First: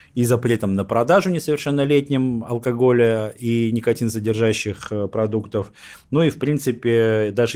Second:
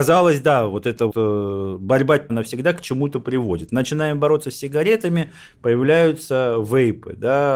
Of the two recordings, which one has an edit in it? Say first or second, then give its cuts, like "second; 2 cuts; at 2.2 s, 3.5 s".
second; 2 cuts; at 1.1 s, 2.3 s